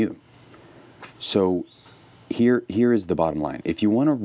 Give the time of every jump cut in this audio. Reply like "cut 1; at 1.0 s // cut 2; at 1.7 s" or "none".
cut 1; at 1.1 s